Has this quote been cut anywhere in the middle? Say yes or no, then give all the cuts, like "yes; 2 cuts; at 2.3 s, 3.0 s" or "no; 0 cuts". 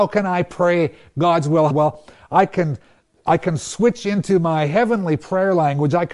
yes; 1 cut; at 1.7 s